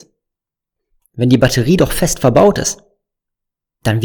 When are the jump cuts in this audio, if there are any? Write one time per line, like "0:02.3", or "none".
0:01.0

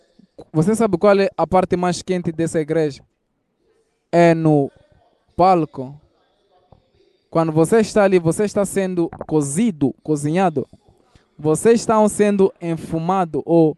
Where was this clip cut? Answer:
none

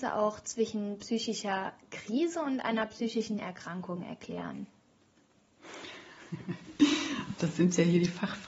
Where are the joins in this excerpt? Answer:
none

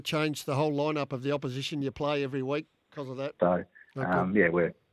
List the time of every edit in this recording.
0:03.4

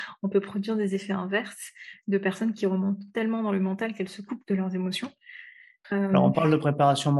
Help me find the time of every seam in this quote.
0:05.8

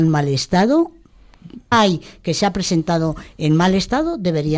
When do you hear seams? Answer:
0:01.7

